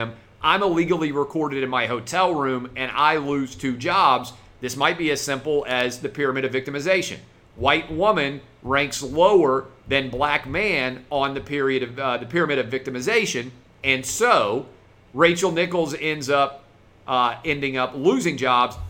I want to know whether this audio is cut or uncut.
uncut